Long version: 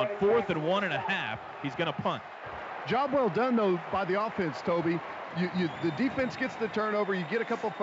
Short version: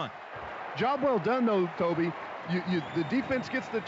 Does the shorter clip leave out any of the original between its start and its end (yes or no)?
yes